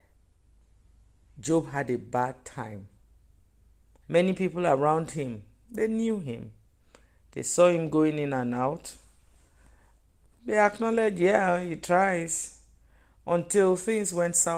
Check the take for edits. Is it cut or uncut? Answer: cut